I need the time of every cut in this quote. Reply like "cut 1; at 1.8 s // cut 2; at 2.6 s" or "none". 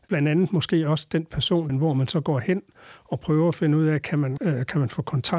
cut 1; at 1.7 s // cut 2; at 4.4 s